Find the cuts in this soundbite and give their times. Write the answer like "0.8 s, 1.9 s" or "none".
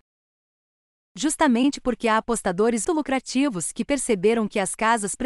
2.8 s